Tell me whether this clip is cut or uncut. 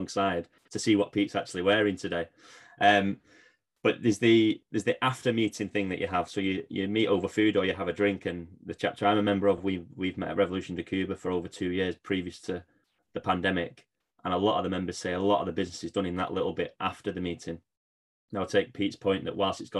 uncut